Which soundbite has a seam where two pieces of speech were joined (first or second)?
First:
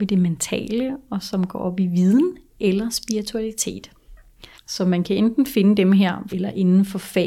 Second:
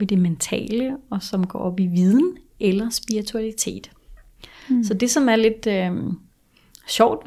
first